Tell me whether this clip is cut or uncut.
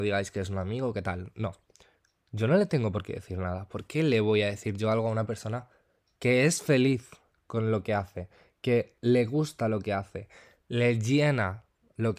uncut